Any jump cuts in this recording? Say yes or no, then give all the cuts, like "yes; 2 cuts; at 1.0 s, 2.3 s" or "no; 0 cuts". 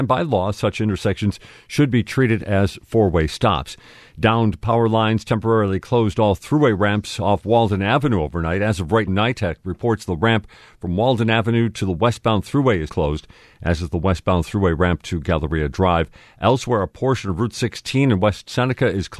yes; 2 cuts; at 9.1 s, 12.9 s